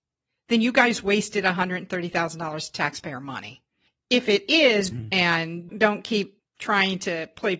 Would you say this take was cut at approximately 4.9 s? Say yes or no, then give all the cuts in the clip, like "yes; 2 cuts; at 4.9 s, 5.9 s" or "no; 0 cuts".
yes; 1 cut; at 4.9 s